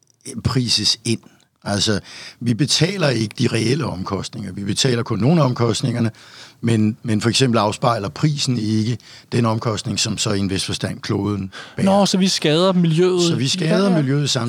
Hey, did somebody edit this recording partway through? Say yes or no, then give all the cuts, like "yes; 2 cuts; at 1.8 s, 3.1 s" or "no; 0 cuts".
no; 0 cuts